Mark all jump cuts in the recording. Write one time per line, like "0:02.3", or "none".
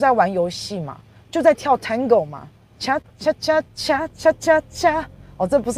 0:03.6